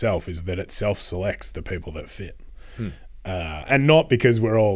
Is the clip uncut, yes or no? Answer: yes